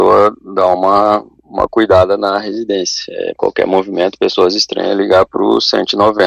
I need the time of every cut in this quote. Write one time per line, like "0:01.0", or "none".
0:03.4